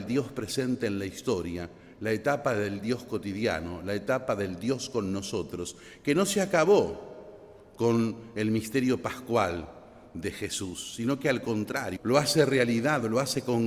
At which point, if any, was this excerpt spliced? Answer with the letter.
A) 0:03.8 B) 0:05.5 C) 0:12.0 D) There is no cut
C